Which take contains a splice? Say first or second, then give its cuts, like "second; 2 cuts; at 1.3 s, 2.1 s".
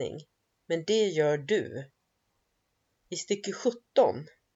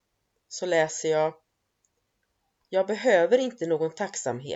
first; 1 cut; at 2.9 s